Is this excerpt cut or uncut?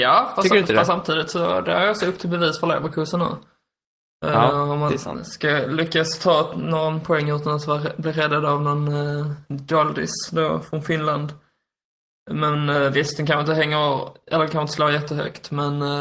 uncut